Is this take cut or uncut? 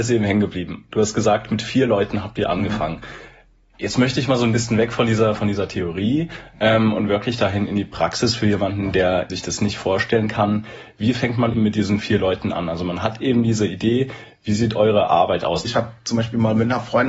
cut